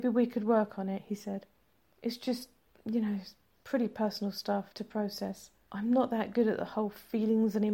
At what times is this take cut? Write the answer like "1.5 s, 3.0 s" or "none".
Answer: none